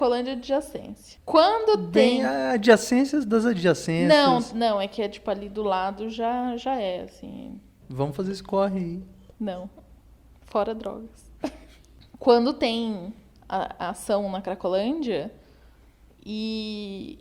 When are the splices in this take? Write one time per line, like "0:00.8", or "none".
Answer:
0:07.8